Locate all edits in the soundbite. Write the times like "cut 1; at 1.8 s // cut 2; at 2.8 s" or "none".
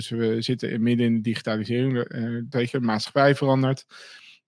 cut 1; at 2.5 s